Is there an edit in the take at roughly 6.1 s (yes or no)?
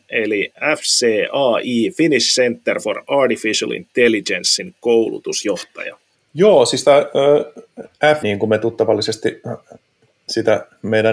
yes